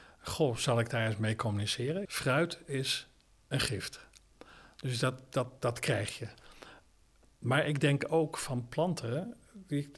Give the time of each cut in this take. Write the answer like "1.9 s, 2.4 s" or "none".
2.0 s